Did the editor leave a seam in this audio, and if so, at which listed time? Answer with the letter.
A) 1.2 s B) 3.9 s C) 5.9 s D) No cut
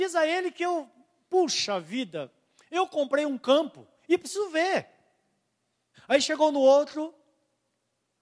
C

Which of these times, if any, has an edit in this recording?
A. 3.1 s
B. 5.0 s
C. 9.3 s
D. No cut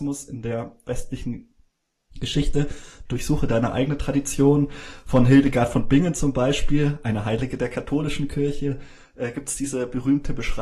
A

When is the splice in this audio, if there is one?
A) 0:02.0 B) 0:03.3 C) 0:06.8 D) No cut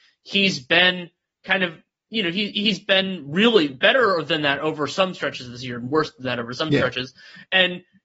D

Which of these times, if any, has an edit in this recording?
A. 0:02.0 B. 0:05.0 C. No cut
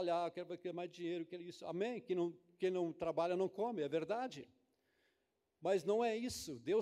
C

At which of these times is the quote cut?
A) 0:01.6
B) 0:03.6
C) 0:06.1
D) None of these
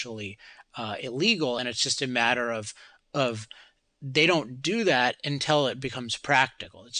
D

